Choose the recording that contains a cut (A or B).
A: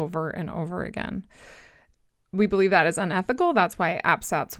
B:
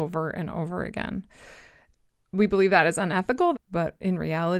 B